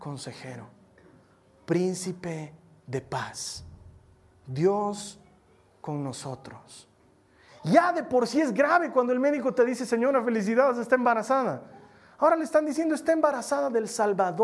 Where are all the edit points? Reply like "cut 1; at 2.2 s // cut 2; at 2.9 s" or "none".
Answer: cut 1; at 7.5 s